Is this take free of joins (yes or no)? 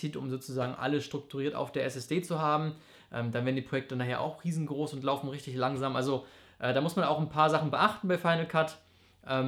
yes